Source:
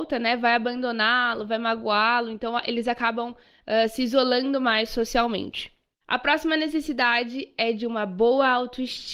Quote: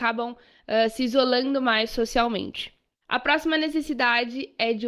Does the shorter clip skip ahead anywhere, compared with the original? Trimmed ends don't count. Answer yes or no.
no